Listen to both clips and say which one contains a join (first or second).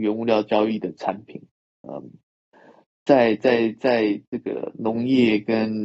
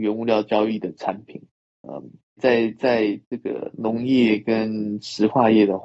second